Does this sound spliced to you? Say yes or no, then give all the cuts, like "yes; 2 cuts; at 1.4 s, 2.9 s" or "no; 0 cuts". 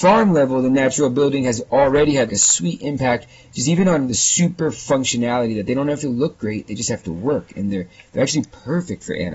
yes; 1 cut; at 2.3 s